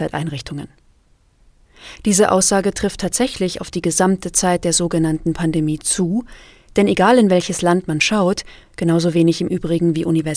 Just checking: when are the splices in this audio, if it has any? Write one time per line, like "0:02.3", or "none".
0:02.0
0:08.6